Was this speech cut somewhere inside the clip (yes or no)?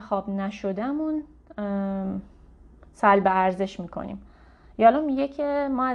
no